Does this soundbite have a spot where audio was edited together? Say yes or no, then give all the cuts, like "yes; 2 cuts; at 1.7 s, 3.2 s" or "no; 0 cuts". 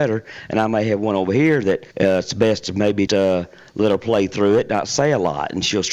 yes; 2 cuts; at 1.9 s, 3.1 s